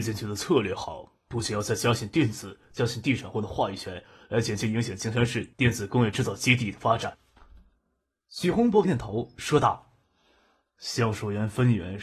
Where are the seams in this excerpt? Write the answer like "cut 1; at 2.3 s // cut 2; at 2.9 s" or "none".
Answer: cut 1; at 8.8 s // cut 2; at 10.0 s